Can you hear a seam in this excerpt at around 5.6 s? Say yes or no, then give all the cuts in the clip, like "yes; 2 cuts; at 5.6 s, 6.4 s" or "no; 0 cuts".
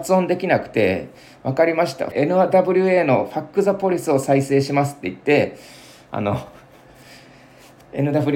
no; 1 cut; at 2.1 s